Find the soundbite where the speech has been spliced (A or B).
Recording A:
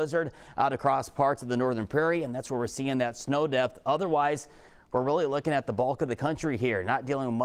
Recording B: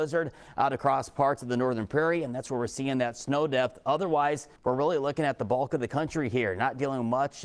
B